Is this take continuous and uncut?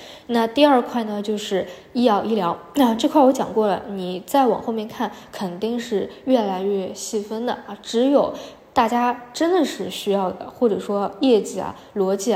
yes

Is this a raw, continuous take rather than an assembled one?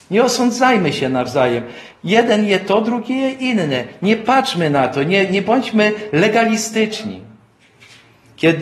yes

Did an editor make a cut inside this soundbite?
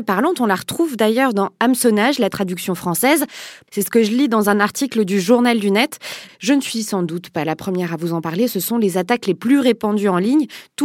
yes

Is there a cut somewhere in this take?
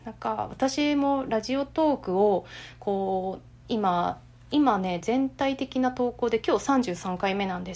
no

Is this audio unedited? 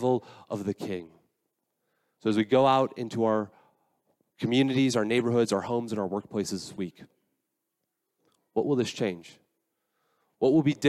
no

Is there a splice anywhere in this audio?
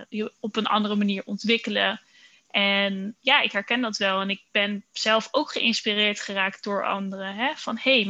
no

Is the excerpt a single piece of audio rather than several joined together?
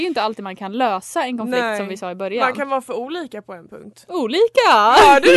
yes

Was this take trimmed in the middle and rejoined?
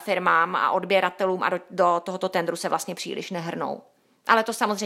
no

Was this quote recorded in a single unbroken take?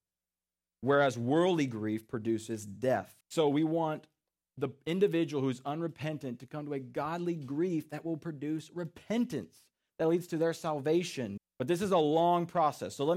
no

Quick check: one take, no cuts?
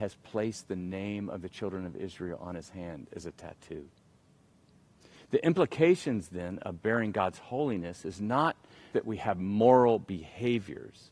no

